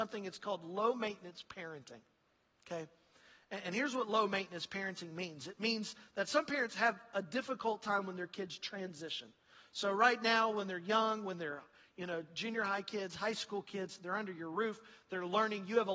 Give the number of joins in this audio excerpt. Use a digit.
0